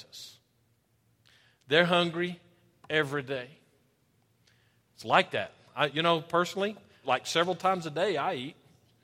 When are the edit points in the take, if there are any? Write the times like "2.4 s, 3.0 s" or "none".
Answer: 7.0 s